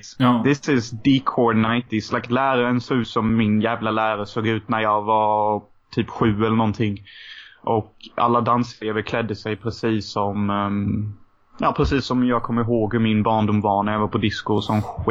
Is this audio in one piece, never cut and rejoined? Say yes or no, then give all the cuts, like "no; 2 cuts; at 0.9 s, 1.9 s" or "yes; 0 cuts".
yes; 0 cuts